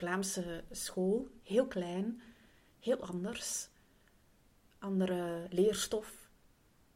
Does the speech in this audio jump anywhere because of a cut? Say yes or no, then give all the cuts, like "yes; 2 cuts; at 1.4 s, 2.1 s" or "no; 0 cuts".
no; 0 cuts